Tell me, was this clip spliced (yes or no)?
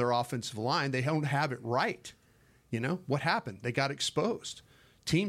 no